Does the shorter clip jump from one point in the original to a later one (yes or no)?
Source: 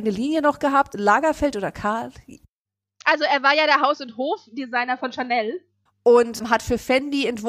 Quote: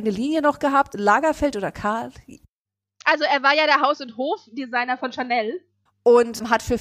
no